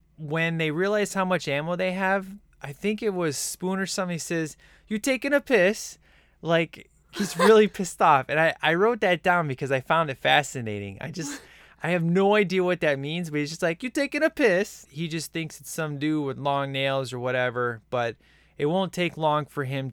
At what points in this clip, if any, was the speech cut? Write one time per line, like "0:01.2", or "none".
0:07.1
0:14.9